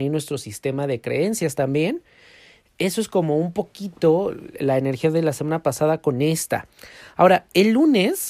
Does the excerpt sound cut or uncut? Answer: uncut